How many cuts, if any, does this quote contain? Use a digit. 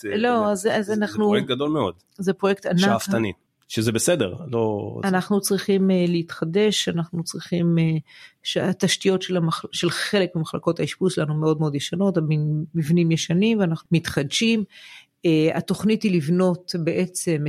0